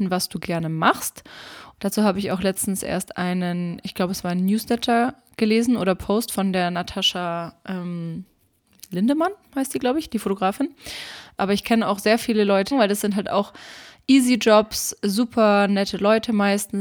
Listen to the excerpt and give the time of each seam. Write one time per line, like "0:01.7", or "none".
0:01.8
0:11.4
0:12.7